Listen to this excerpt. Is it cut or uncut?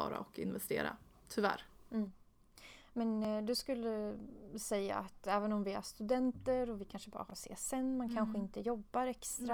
uncut